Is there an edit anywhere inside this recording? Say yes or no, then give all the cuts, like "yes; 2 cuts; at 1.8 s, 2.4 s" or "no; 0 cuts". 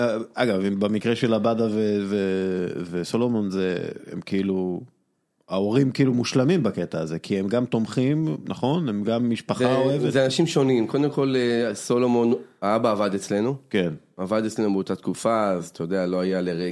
no; 0 cuts